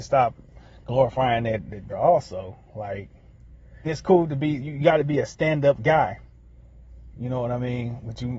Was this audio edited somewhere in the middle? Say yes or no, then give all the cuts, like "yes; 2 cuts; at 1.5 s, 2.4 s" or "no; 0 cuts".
yes; 3 cuts; at 1.9 s, 3.8 s, 7.1 s